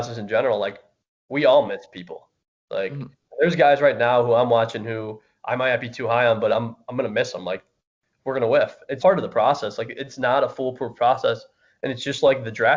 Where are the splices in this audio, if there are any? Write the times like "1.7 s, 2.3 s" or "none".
2.5 s, 9.0 s